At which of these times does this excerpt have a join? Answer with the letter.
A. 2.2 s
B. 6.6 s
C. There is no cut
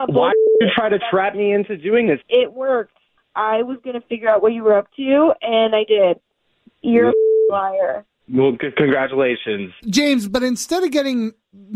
A